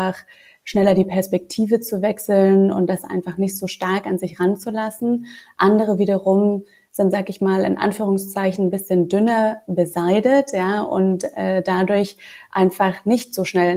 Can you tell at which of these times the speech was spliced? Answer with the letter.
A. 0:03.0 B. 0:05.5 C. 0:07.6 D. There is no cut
D